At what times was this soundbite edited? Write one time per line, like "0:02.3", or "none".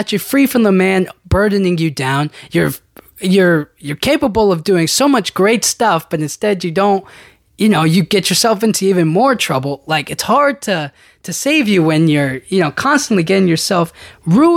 none